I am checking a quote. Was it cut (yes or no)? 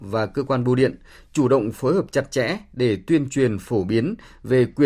no